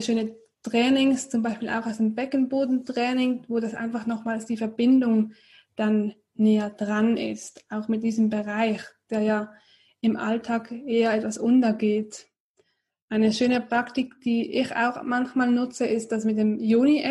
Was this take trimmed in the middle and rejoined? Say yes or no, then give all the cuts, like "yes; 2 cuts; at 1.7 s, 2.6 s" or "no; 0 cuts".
no; 0 cuts